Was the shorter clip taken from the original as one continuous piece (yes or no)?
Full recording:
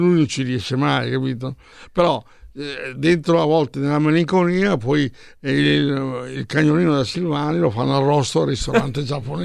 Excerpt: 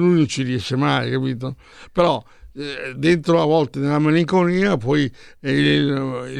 yes